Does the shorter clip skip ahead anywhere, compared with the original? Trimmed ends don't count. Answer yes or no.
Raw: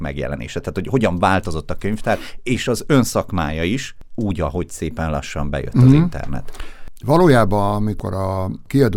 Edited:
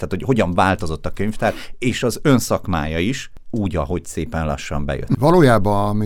yes